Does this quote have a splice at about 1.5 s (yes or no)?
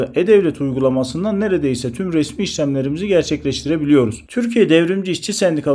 no